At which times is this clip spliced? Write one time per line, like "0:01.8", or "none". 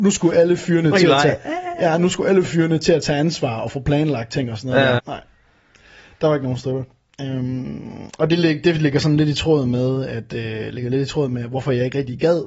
0:05.0